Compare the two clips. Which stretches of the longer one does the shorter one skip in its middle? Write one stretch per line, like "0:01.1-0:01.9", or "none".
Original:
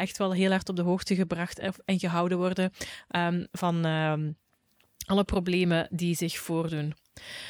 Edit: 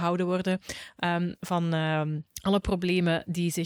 0:04.4-0:04.9